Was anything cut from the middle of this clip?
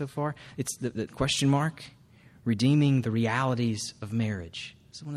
yes; 1 cut; at 1.1 s

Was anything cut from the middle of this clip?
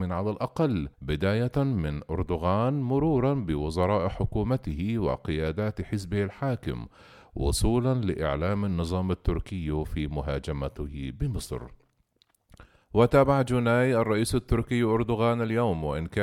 yes; 1 cut; at 0.9 s

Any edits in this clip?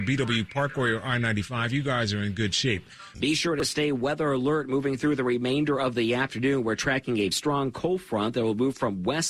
yes; 2 cuts; at 3.1 s, 7.3 s

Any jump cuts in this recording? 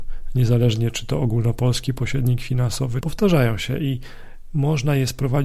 yes; 1 cut; at 3.0 s

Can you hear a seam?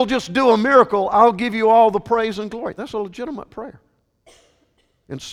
no; 0 cuts

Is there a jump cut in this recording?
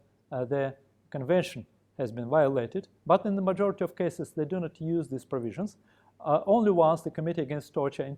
yes; 1 cut; at 3.0 s

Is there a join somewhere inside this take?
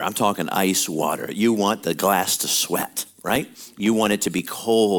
no; 0 cuts

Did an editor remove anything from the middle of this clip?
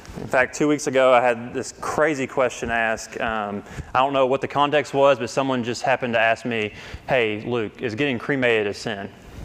no; 0 cuts

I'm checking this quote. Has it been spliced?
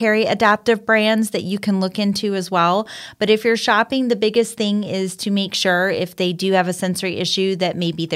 no; 0 cuts

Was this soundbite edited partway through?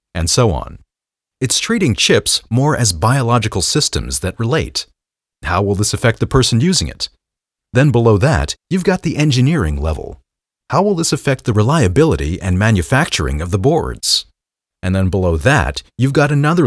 yes; 1 cut; at 5.3 s

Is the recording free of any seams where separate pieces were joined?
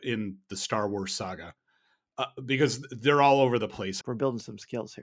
no; 1 cut; at 4.0 s

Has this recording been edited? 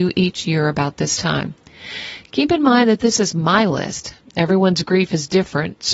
no; 0 cuts

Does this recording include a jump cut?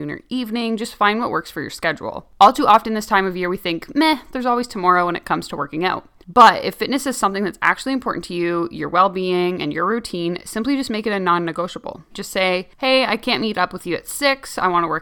yes; 1 cut; at 12.1 s

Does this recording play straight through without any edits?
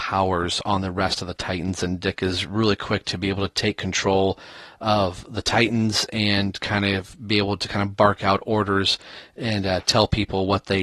yes; 0 cuts

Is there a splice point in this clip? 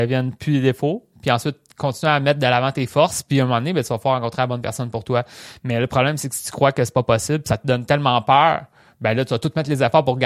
no; 0 cuts

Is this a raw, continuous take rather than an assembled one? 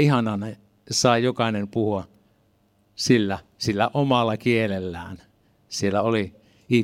yes; 0 cuts

